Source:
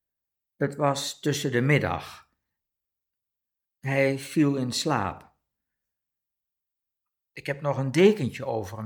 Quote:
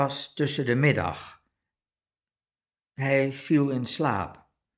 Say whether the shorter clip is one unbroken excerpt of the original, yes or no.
yes